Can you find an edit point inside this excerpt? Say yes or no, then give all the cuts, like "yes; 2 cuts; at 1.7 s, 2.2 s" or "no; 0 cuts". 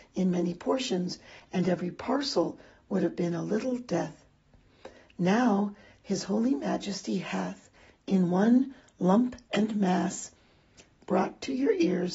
no; 0 cuts